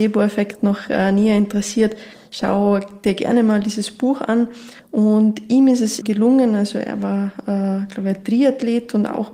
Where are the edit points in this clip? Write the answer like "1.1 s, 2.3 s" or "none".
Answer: 6.0 s

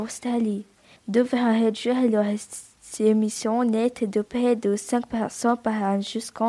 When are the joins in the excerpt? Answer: 1.0 s

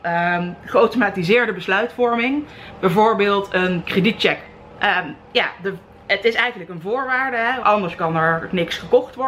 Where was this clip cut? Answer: 4.8 s, 7.6 s

